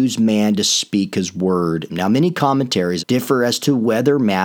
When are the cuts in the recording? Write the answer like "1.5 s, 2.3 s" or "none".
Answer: 1.9 s, 3.0 s

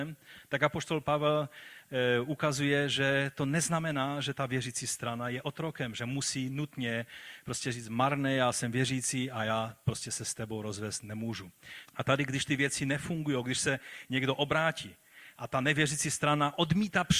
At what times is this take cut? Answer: 11.8 s

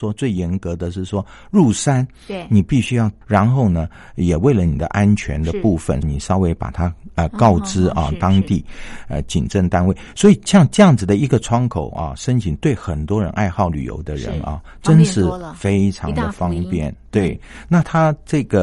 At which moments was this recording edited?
3.2 s, 6.0 s

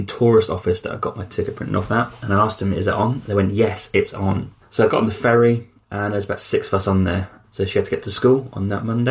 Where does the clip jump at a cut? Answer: 4.6 s, 7.4 s

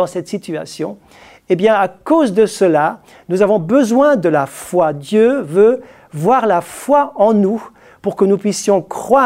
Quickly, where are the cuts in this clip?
none

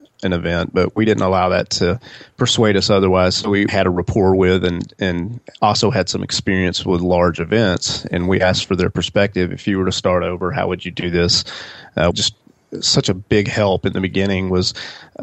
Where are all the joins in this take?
3.7 s, 12.1 s

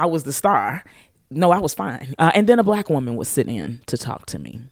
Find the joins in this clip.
2.1 s

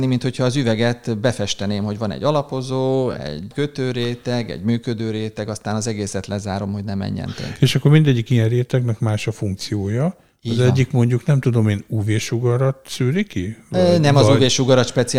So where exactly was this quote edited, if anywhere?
none

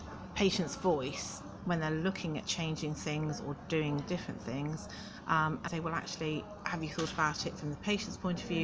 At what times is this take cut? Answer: 1.6 s, 5.7 s

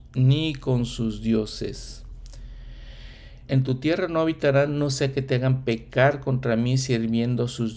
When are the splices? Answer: 3.5 s

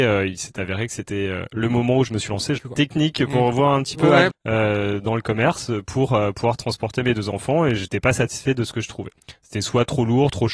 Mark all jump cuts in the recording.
2.6 s, 4.3 s

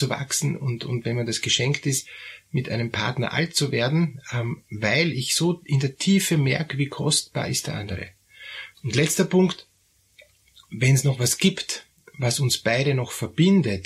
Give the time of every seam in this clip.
8.7 s

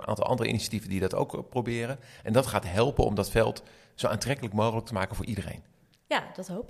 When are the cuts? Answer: none

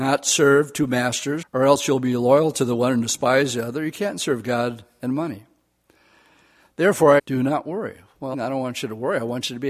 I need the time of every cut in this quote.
1.4 s, 7.2 s, 8.3 s

